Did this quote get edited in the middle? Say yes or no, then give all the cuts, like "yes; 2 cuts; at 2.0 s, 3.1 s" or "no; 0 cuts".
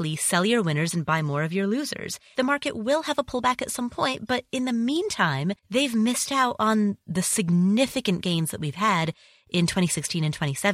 yes; 2 cuts; at 2.4 s, 5.6 s